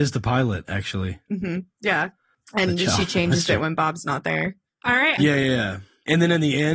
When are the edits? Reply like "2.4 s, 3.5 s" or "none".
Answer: 5.2 s